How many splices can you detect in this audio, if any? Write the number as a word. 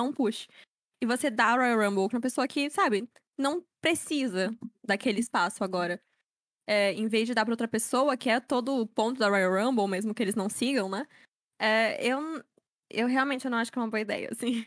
one